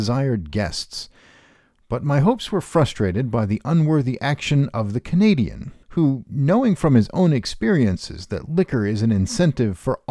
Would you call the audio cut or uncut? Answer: cut